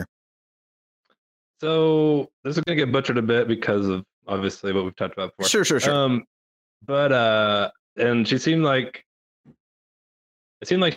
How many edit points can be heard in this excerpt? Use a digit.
1